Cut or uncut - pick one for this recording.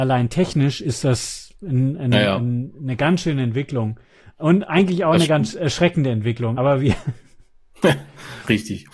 uncut